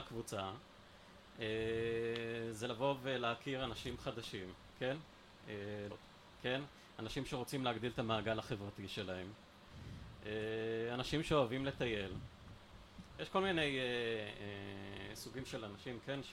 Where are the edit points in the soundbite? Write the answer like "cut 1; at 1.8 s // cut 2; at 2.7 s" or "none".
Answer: cut 1; at 5.9 s // cut 2; at 13.1 s